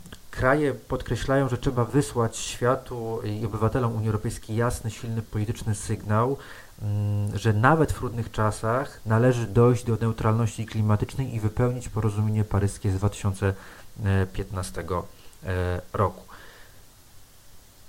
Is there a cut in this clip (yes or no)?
yes